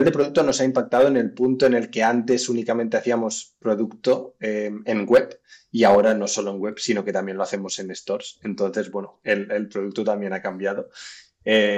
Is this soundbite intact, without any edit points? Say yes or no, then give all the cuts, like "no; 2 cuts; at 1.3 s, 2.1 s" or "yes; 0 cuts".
yes; 0 cuts